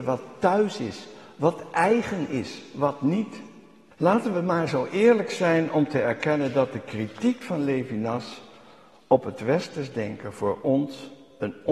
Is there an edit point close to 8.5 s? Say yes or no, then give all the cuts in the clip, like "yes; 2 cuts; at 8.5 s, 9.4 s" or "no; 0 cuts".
no; 1 cut; at 3.9 s